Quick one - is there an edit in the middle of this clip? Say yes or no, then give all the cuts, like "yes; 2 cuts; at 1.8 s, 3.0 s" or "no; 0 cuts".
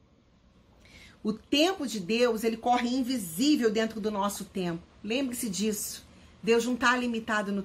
no; 0 cuts